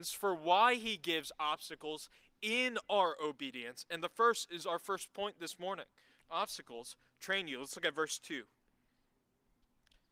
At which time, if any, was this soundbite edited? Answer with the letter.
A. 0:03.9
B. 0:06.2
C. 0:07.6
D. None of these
B